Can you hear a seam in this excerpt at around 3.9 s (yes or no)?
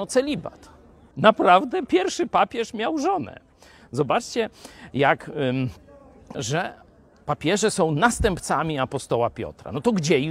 no